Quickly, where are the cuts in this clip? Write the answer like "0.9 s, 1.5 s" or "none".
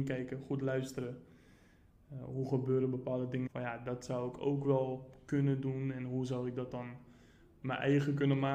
3.5 s